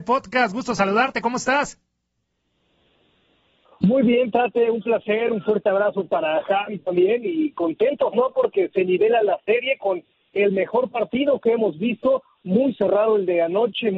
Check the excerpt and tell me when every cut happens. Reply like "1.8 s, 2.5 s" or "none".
none